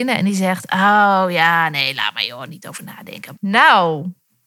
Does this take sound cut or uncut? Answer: cut